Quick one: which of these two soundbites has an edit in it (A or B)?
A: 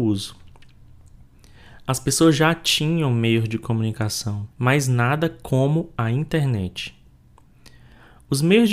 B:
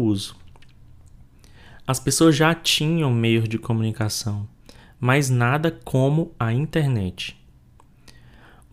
A